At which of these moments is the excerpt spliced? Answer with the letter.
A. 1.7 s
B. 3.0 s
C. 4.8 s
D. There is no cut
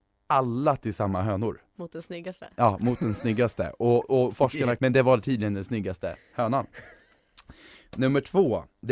C